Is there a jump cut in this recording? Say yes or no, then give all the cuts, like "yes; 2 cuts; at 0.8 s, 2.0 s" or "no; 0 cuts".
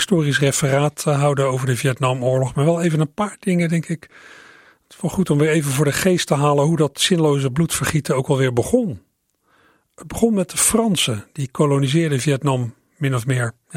no; 0 cuts